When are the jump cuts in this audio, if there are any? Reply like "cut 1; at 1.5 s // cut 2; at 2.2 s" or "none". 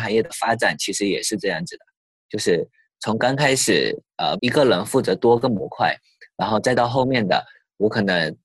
cut 1; at 4.4 s